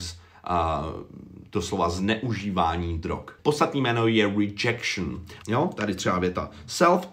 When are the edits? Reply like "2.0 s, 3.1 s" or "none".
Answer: 3.4 s, 5.4 s